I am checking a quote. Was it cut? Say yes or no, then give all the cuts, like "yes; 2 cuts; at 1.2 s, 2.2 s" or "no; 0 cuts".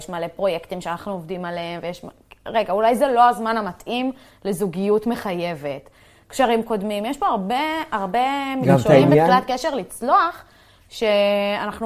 no; 0 cuts